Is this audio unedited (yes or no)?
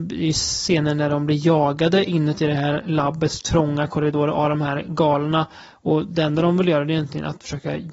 yes